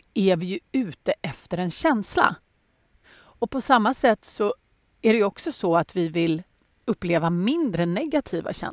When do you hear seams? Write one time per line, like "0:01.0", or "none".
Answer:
0:03.0

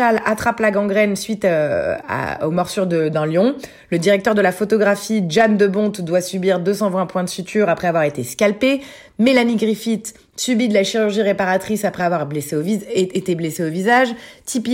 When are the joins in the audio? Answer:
none

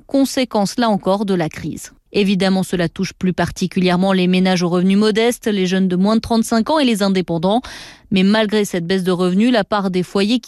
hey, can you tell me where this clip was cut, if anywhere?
0:02.1

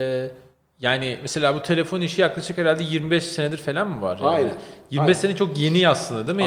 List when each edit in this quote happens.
none

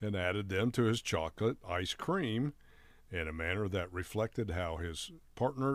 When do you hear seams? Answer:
none

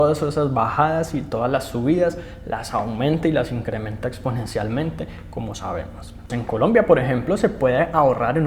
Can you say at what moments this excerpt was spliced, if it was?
0:06.3

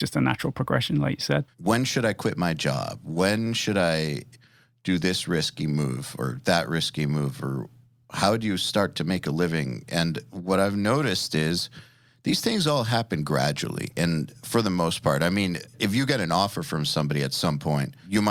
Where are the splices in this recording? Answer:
0:01.5

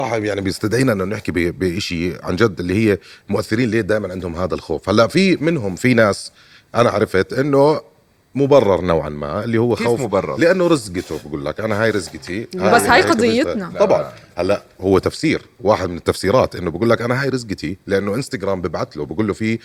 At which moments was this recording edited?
none

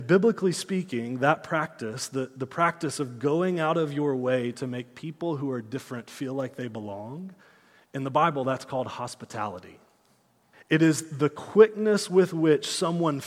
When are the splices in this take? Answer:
0:10.5

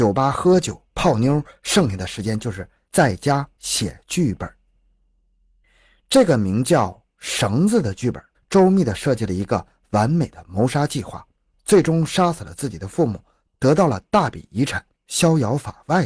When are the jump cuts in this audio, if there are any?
0:08.3

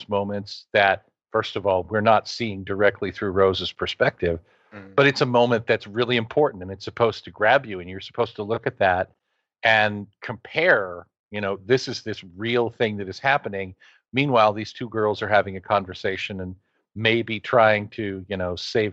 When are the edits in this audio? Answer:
none

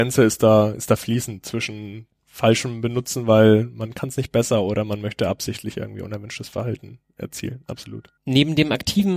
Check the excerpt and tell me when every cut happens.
0:08.2

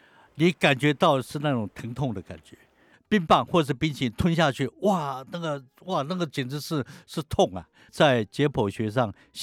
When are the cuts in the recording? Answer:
0:02.9
0:07.9

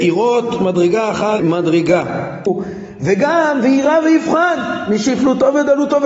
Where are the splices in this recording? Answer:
0:01.4
0:02.5

